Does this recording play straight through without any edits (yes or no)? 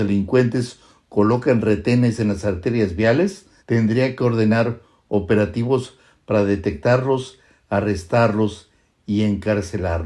no